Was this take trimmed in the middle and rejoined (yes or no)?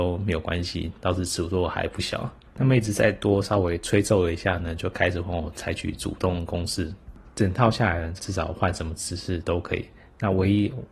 yes